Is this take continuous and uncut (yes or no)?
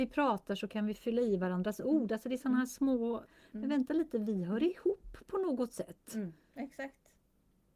no